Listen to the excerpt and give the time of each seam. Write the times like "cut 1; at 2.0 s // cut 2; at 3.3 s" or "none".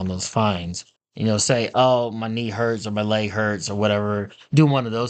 cut 1; at 1.0 s